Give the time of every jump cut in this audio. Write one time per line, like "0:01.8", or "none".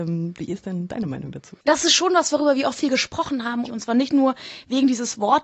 0:01.6
0:03.6